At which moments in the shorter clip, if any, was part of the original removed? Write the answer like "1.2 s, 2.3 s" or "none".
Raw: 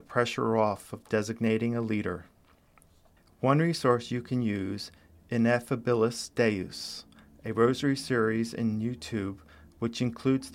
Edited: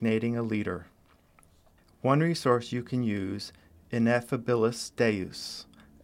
none